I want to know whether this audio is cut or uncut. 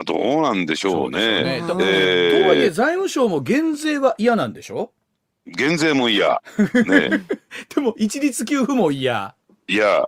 uncut